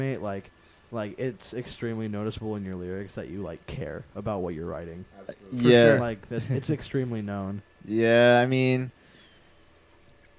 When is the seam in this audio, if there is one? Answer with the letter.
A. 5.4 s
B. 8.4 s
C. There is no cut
C